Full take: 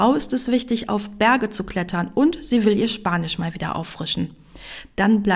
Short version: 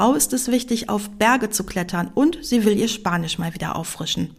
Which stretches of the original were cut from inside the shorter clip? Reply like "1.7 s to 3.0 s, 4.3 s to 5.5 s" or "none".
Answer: none